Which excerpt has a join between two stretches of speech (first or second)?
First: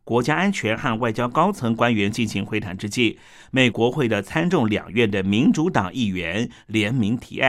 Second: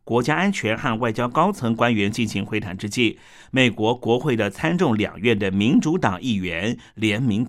first